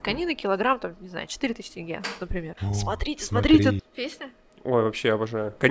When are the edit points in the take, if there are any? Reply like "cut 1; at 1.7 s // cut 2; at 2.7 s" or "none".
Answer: cut 1; at 2.6 s // cut 2; at 3.8 s